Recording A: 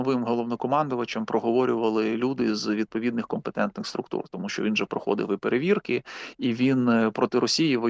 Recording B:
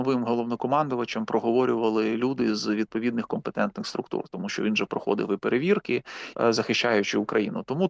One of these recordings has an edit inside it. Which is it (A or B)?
B